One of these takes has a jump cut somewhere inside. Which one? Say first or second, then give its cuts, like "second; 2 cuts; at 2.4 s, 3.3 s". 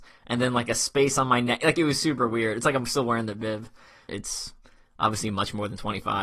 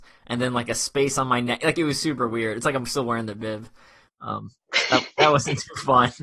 first; 1 cut; at 4.1 s